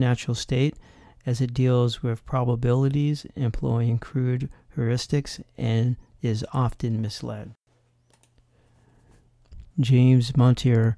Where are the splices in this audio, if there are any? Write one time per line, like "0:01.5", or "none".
0:09.7